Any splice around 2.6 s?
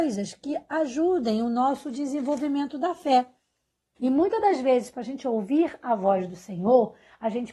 no; 1 cut; at 4.0 s

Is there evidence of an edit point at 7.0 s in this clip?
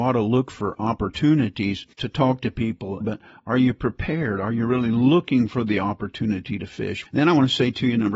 yes; 3 cuts; at 1.9 s, 3.0 s, 7.0 s

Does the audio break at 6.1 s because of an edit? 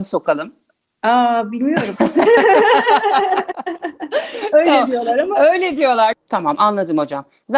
yes; 1 cut; at 6.1 s

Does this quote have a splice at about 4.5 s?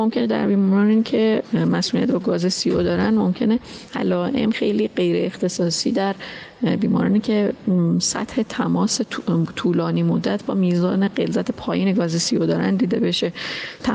yes; 1 cut; at 4.5 s

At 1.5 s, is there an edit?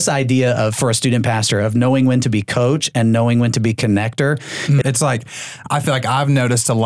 no; 1 cut; at 4.8 s

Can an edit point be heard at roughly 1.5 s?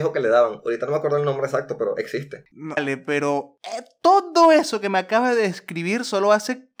no; 1 cut; at 2.8 s

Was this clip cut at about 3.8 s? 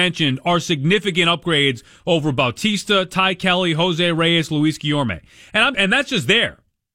no; 1 cut; at 5.7 s

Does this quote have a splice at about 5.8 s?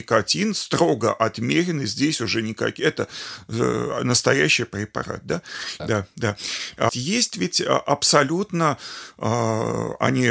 yes; 2 cuts; at 5.8 s, 6.9 s

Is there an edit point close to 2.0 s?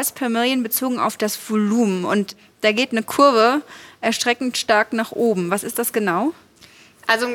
no; 0 cuts

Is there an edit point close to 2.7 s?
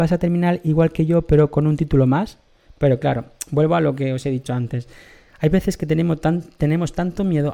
yes; 1 cut; at 2.7 s

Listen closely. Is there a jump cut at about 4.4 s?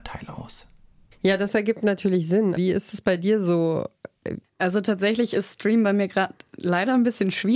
yes; 2 cuts; at 2.6 s, 4.4 s

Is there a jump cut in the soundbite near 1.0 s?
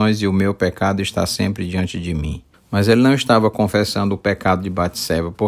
no; 1 cut; at 2.5 s

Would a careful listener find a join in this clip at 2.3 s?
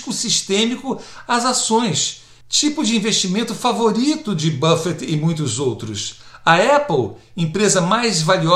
no; 0 cuts

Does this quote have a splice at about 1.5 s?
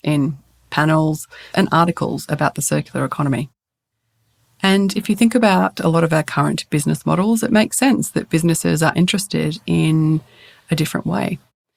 yes; 1 cut; at 1.5 s

